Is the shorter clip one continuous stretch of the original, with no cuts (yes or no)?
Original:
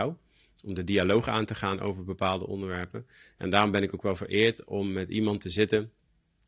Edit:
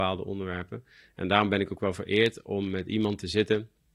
yes